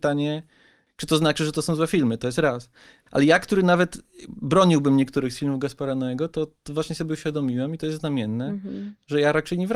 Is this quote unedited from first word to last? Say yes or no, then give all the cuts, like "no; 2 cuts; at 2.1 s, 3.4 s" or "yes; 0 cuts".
yes; 0 cuts